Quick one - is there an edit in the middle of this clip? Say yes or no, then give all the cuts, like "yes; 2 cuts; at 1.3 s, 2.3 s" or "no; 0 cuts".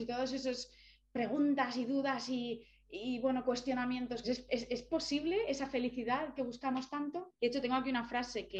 yes; 2 cuts; at 4.2 s, 7.4 s